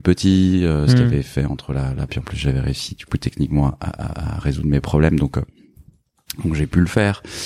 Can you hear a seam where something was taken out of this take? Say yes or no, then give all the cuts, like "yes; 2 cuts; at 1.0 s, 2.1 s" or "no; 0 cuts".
yes; 1 cut; at 2.1 s